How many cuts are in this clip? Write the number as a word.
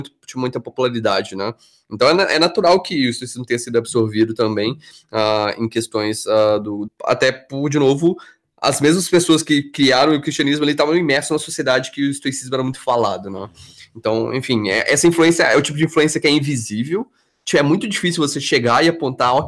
one